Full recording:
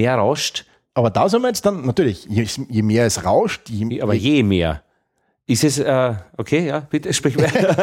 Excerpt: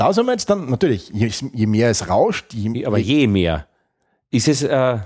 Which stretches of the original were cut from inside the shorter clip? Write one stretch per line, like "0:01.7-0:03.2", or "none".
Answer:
none

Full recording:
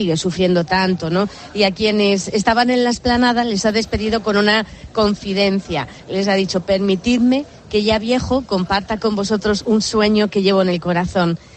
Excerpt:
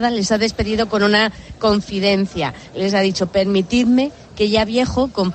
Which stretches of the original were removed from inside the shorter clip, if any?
none

